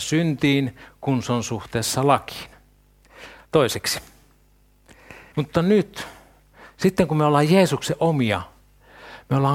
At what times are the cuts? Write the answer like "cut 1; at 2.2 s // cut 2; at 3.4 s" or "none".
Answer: cut 1; at 3.4 s // cut 2; at 5.3 s

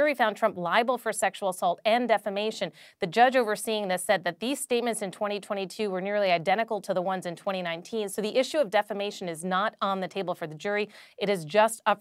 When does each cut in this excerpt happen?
none

